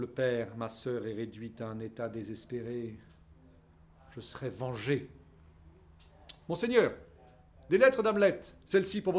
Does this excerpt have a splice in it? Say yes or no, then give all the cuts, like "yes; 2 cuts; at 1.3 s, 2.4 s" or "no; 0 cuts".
no; 0 cuts